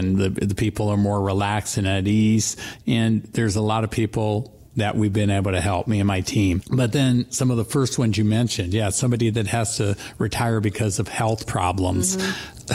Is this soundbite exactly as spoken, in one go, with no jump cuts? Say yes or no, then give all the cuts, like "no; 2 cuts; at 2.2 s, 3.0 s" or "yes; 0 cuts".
yes; 0 cuts